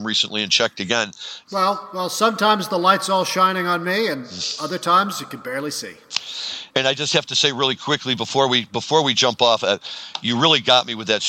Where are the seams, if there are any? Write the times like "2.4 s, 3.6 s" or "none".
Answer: 1.4 s, 6.7 s